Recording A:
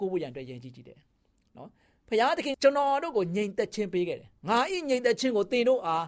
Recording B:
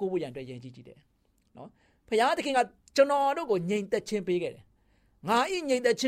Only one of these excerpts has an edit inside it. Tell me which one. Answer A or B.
A